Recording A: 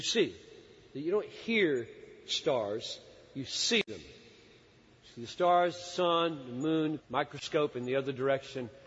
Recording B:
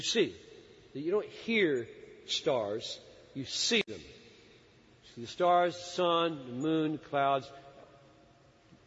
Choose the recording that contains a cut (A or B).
A